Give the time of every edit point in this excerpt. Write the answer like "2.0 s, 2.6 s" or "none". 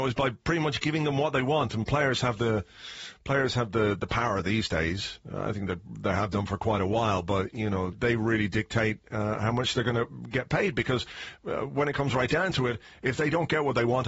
7.9 s